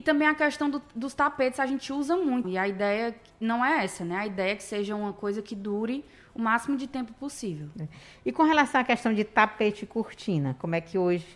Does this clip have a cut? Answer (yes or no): yes